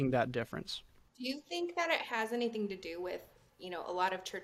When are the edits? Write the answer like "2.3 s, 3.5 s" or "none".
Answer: none